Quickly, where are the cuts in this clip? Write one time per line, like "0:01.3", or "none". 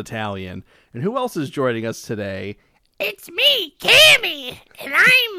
none